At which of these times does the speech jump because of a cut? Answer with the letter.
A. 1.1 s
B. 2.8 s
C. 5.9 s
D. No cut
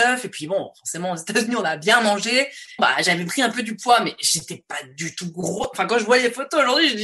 B